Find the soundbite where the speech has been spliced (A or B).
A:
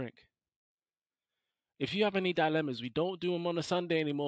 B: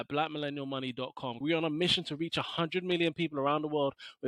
B